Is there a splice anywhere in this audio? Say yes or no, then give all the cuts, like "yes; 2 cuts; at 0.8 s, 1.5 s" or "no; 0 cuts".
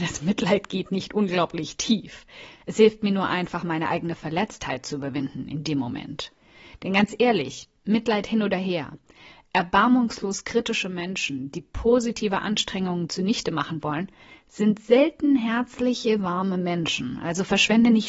no; 0 cuts